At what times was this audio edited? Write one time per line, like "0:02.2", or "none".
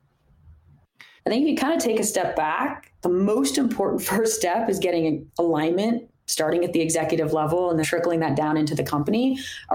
0:01.2
0:07.8